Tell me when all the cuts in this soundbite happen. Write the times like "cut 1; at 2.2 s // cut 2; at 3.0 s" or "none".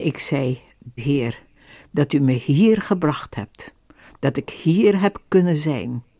cut 1; at 1.0 s